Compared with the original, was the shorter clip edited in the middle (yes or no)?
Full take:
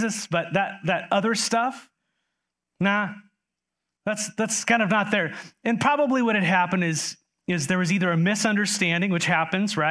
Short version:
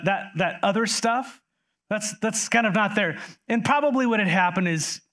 yes